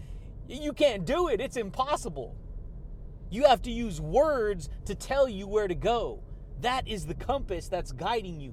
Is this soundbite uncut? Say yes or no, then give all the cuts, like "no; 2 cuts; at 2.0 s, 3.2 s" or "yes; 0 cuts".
yes; 0 cuts